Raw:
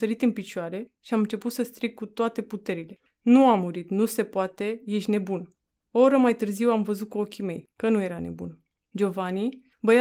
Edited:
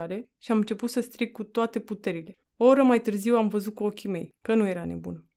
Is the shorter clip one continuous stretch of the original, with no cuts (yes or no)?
no